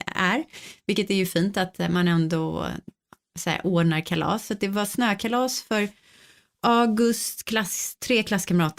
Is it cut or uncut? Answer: uncut